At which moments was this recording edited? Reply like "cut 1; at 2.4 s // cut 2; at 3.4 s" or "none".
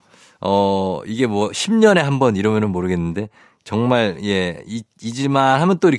none

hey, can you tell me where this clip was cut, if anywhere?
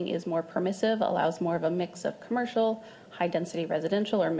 none

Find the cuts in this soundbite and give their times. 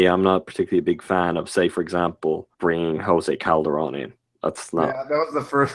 cut 1; at 2.5 s

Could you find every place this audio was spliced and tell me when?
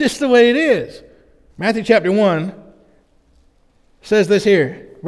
cut 1; at 1.5 s

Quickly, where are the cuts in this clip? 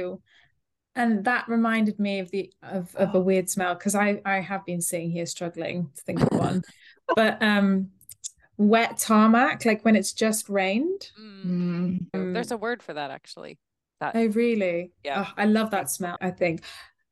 cut 1; at 12.1 s // cut 2; at 16.2 s

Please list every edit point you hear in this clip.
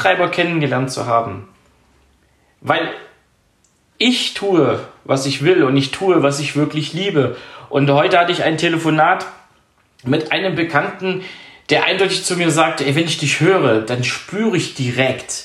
cut 1; at 5.4 s

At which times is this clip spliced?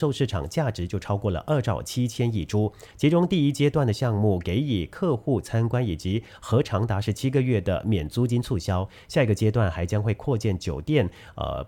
cut 1; at 2.9 s

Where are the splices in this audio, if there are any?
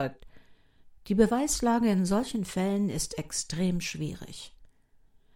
none

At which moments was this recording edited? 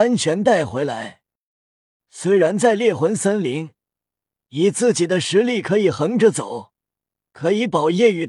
cut 1; at 2.0 s

